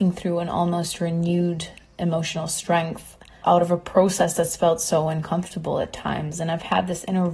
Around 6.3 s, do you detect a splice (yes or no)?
no